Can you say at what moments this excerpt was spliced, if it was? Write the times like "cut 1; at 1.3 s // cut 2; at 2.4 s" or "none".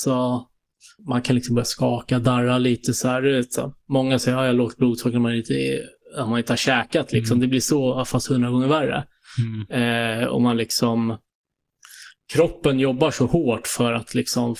cut 1; at 1.0 s